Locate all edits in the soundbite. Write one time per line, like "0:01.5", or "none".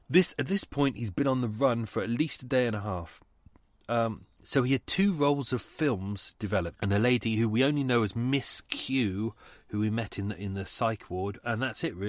0:04.3
0:06.8